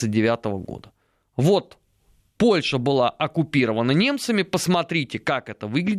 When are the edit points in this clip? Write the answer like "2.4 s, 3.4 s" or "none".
none